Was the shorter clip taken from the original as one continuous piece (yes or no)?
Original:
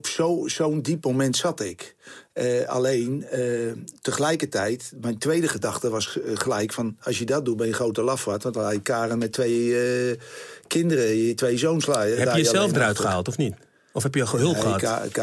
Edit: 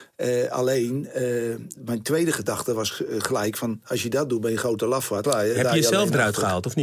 no